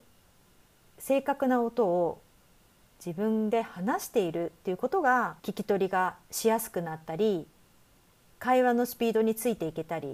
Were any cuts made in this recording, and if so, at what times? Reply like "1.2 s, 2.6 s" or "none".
5.4 s

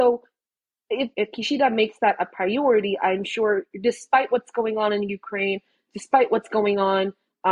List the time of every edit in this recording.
1.1 s

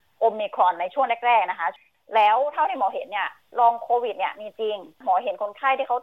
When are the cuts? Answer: none

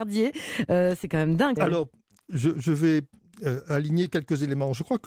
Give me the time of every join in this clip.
1.6 s

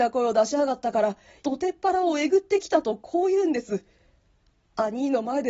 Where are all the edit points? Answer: 1.4 s

